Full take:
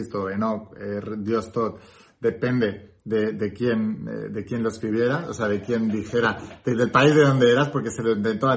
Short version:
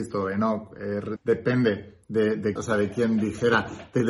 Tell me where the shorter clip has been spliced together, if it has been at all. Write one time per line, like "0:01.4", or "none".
0:01.2
0:02.6